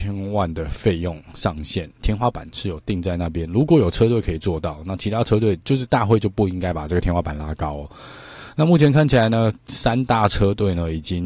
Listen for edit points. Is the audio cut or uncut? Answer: uncut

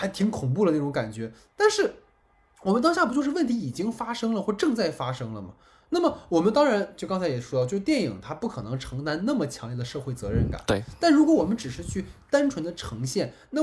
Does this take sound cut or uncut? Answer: uncut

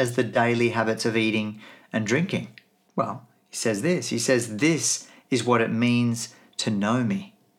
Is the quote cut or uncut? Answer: cut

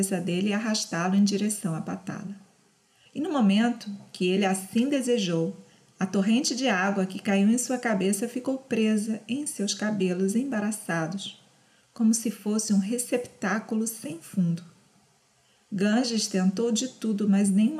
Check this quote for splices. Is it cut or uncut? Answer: cut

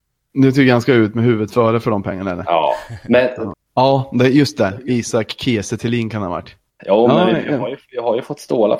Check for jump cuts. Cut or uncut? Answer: cut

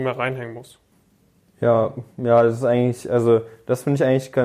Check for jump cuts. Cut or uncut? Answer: uncut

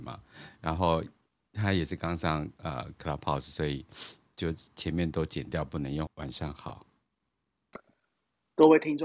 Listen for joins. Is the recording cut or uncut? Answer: cut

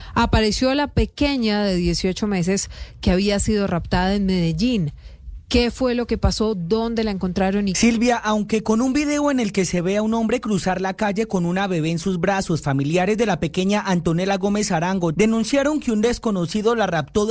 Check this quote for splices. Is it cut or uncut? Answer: cut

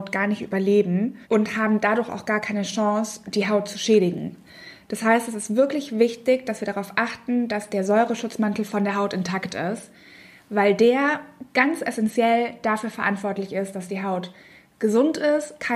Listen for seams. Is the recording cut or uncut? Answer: cut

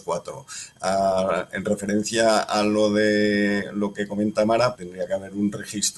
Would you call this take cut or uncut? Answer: cut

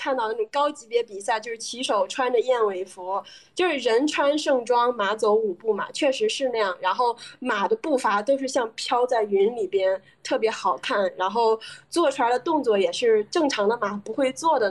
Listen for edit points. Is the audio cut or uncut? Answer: uncut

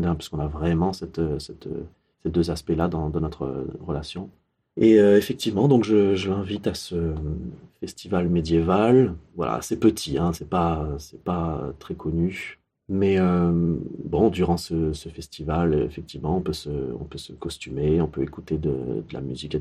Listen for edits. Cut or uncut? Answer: uncut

